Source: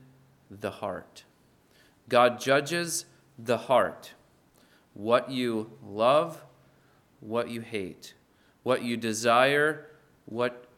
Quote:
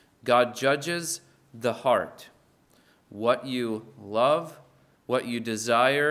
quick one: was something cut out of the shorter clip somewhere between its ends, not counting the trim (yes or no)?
yes